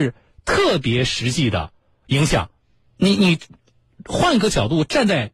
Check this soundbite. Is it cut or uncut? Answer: cut